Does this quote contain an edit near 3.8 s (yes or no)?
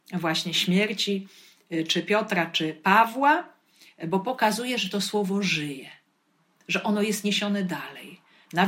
no